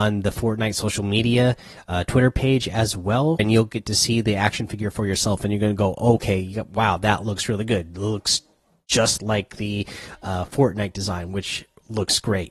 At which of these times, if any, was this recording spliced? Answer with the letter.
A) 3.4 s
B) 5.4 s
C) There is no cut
A